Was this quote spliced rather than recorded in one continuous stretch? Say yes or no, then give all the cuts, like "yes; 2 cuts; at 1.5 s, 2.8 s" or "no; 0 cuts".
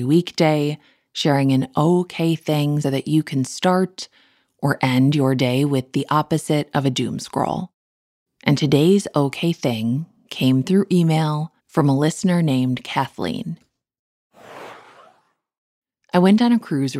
yes; 3 cuts; at 2.8 s, 8.3 s, 11.6 s